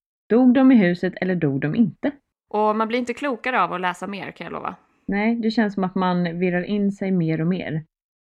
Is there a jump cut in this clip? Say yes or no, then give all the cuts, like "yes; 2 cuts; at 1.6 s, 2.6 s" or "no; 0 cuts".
yes; 1 cut; at 2.3 s